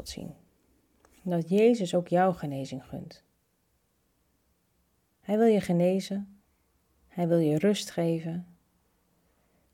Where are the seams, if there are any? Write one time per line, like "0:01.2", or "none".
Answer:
none